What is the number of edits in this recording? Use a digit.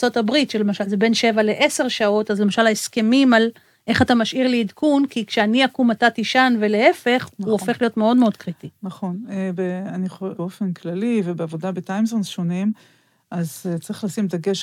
1